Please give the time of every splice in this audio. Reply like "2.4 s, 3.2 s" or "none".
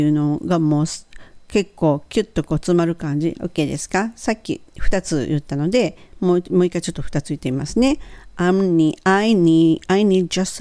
3.3 s